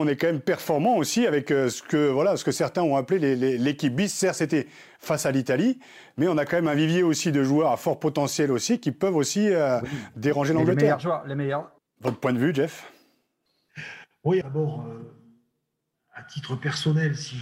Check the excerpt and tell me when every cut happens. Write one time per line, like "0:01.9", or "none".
0:11.8
0:14.4